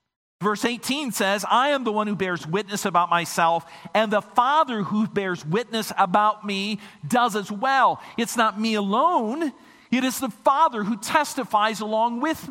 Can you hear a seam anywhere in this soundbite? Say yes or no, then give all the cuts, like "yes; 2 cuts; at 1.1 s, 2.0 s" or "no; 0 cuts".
no; 0 cuts